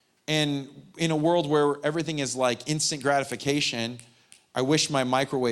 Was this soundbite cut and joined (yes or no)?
no